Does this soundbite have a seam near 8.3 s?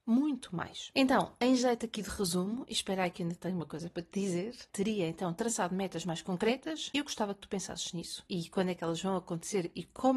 yes; 1 cut; at 8.3 s

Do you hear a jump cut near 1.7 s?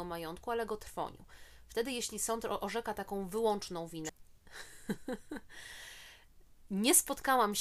no; 1 cut; at 4.1 s

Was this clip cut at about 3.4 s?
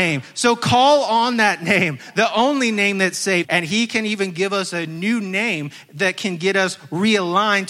yes; 1 cut; at 3.4 s

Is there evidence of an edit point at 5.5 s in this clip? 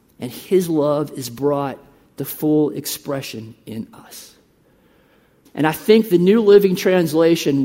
yes; 1 cut; at 5.5 s

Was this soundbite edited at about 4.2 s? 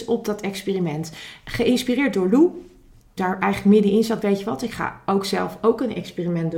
yes; 2 cuts; at 3.2 s, 4.2 s

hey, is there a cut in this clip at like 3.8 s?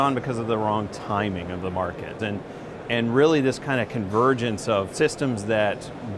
no; 1 cut; at 2.2 s

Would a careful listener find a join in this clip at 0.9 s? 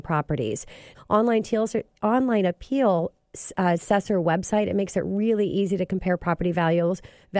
yes; 1 cut; at 0.9 s

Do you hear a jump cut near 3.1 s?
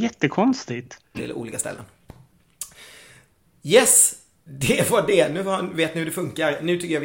no; 1 cut; at 1.1 s

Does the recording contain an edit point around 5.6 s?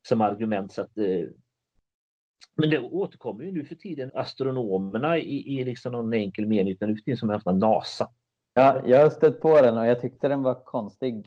no; 2 cuts; at 4.1 s, 8.6 s

